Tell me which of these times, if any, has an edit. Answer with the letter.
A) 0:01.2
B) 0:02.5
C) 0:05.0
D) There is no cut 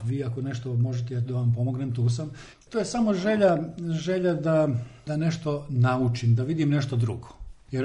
B